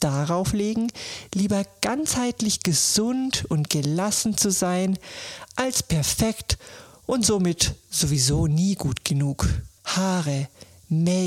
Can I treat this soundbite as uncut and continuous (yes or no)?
no